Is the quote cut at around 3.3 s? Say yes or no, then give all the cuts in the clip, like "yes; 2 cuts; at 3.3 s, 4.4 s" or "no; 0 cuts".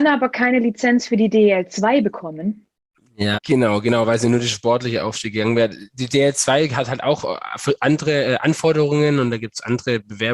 yes; 1 cut; at 3.3 s